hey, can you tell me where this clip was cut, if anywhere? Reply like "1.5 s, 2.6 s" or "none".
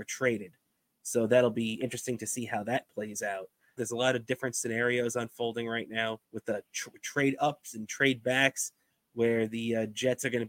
3.8 s, 6.2 s